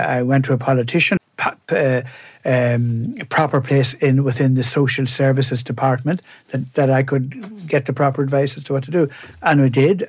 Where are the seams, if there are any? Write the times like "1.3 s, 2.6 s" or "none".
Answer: 1.2 s